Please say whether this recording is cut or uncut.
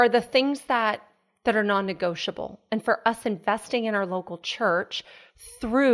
uncut